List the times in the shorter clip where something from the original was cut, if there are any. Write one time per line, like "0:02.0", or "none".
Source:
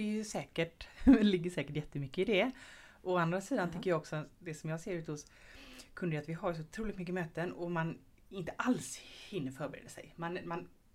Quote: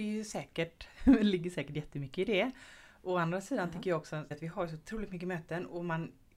0:04.3